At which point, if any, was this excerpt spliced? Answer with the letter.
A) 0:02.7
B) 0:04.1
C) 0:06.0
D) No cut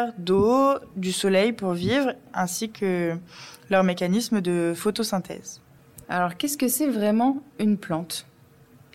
C